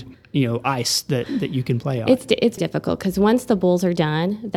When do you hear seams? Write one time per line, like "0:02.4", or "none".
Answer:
0:02.6